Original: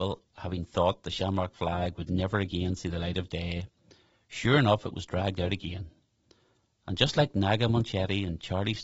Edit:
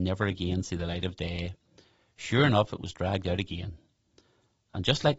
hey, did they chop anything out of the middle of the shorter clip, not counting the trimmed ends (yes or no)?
no